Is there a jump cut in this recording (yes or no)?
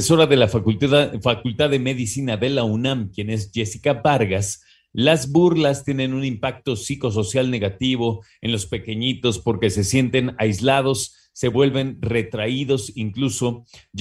no